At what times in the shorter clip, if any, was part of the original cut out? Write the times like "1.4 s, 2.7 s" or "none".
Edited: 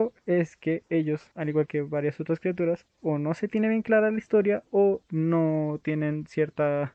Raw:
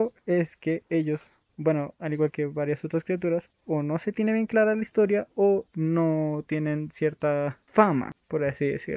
1.3 s